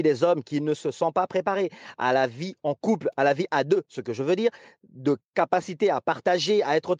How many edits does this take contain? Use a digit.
0